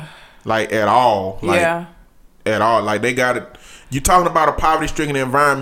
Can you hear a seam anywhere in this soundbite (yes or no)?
no